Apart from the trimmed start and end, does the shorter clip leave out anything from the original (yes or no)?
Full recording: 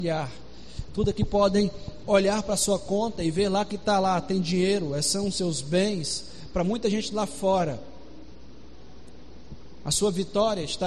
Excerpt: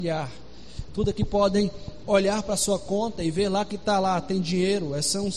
no